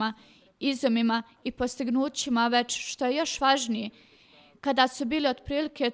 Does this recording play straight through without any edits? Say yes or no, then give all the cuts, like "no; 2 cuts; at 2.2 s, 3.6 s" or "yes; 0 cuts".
yes; 0 cuts